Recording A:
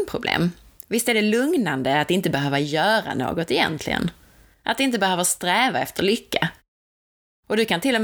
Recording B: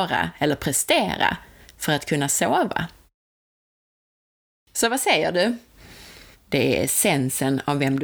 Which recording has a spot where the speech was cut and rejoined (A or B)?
B